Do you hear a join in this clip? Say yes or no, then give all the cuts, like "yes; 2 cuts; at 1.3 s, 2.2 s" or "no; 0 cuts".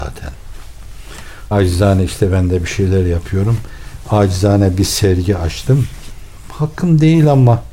yes; 1 cut; at 1.5 s